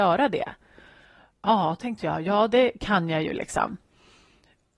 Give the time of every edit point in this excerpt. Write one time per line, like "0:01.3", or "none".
none